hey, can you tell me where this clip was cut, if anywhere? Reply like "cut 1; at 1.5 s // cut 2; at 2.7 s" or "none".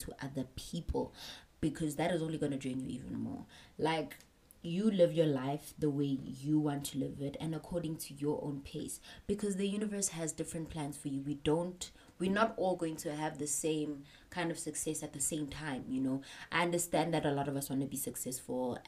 none